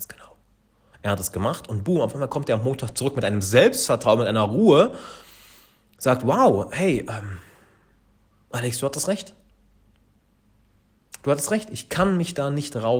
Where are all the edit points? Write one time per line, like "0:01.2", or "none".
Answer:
0:00.9